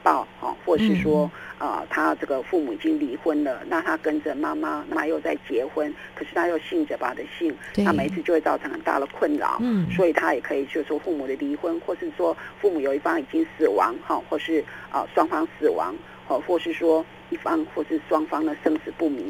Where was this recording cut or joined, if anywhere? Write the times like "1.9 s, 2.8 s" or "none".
4.9 s, 7.0 s